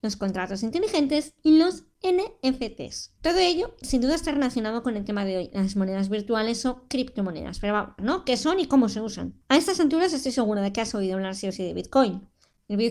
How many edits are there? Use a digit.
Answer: 1